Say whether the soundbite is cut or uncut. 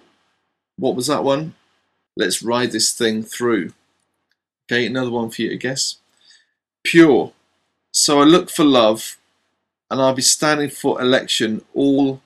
cut